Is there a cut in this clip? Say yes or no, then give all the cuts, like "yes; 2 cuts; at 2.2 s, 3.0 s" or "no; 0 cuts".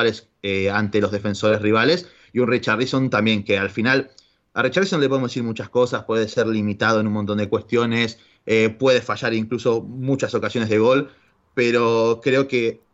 no; 0 cuts